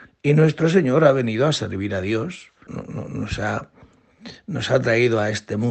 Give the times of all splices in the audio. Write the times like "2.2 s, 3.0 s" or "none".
2.7 s

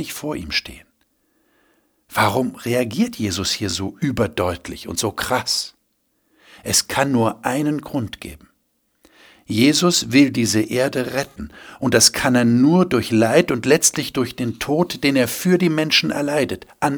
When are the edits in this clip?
none

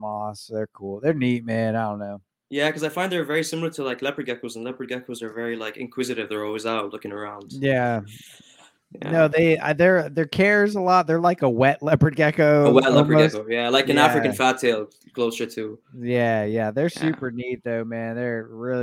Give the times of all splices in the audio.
none

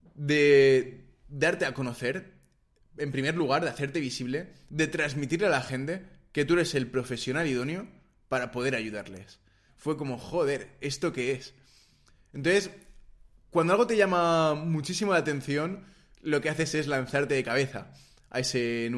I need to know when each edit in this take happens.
4.7 s, 9.7 s

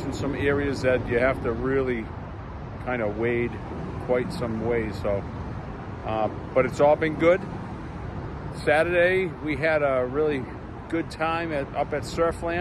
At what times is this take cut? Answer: none

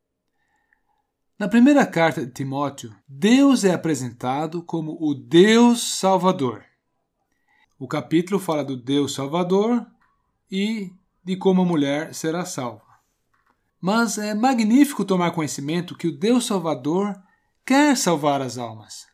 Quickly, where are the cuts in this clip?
3.0 s, 7.6 s

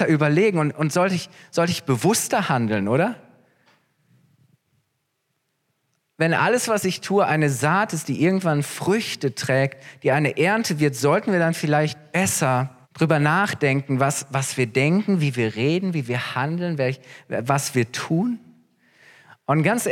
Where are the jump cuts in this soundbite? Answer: 12.8 s

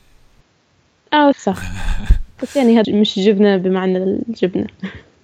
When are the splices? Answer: 1.3 s, 2.8 s

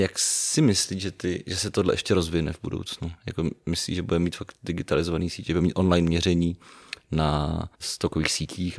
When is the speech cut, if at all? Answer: 7.7 s

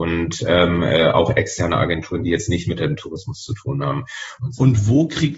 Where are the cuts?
4.4 s

